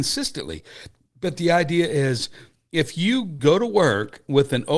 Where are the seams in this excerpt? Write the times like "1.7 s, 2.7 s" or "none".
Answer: 3.4 s